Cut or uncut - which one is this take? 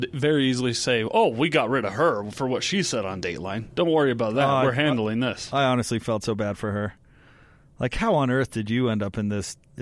uncut